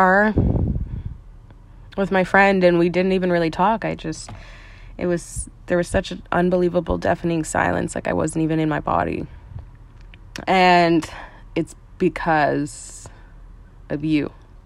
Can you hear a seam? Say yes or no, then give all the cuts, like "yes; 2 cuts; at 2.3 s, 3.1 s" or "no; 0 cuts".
yes; 1 cut; at 10.4 s